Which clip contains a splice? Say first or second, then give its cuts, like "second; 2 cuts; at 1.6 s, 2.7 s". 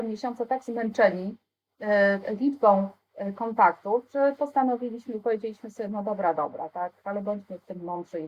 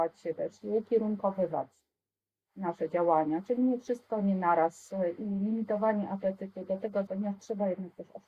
second; 1 cut; at 7.1 s